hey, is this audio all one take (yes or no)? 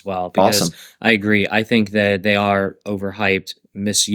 yes